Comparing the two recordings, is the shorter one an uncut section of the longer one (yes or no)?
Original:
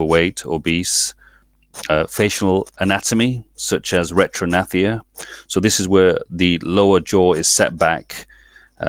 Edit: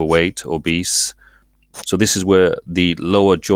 no